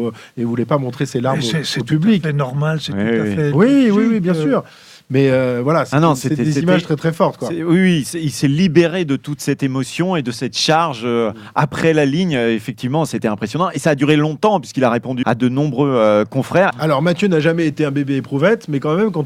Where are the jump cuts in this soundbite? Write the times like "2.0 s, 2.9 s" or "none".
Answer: 15.2 s, 16.7 s